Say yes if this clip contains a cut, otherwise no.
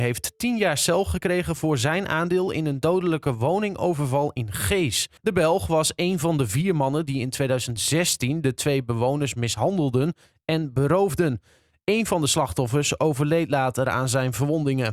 yes